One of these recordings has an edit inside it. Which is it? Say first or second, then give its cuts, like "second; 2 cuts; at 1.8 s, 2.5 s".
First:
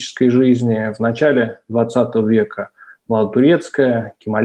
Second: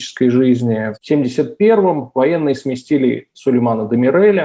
second; 1 cut; at 0.9 s